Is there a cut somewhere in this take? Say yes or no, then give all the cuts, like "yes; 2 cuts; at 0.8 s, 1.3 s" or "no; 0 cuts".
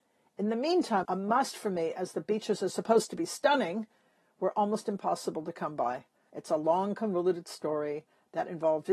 yes; 2 cuts; at 1.0 s, 6.3 s